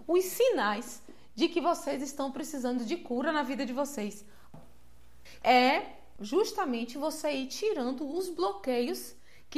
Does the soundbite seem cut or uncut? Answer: cut